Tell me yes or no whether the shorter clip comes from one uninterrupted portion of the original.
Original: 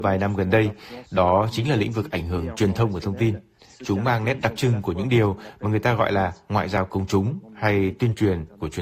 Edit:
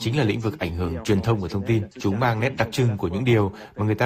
no